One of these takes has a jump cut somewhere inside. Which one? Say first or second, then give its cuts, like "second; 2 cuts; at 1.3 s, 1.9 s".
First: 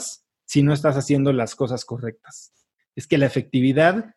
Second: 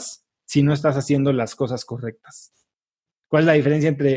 first; 1 cut; at 2.8 s